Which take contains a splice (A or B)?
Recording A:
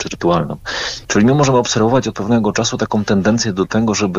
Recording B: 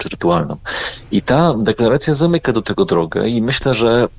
A